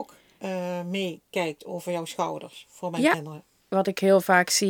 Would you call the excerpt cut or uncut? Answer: uncut